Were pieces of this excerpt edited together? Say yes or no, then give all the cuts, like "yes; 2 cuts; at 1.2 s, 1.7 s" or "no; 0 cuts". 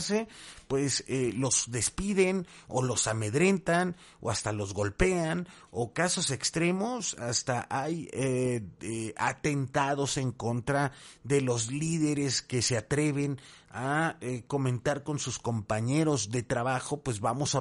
no; 0 cuts